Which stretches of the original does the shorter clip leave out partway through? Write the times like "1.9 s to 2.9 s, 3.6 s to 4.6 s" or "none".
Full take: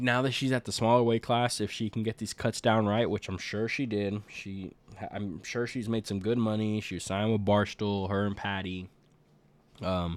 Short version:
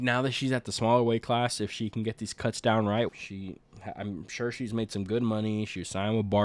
3.1 s to 4.2 s